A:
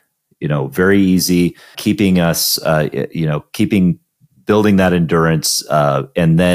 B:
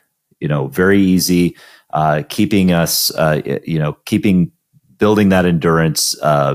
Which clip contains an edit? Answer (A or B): A